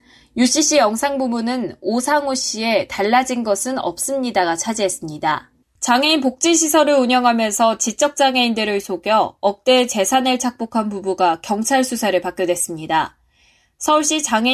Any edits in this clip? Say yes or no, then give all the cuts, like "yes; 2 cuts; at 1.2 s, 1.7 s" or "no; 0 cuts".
yes; 1 cut; at 5.6 s